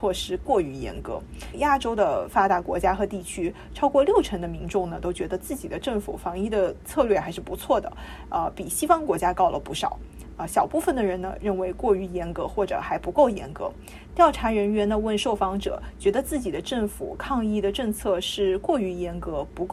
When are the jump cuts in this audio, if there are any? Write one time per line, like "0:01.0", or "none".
0:01.5
0:14.1